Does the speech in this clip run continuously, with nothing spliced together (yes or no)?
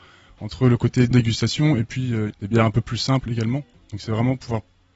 no